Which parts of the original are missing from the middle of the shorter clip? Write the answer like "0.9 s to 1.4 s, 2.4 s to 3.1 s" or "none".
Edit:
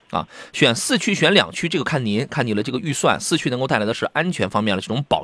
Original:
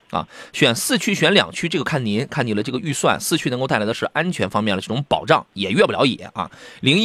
none

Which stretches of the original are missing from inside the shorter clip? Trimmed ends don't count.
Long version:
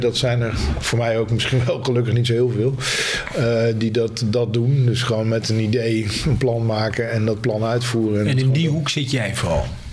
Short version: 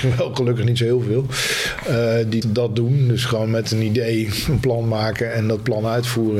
3.9 s to 4.2 s

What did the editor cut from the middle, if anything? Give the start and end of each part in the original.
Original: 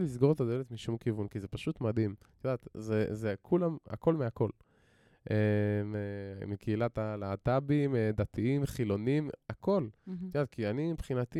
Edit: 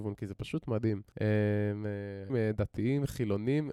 2.2 s to 5.2 s, 6.4 s to 7.9 s

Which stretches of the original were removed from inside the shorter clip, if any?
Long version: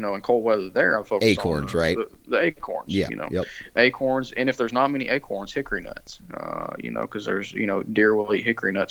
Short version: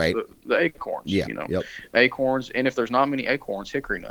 none

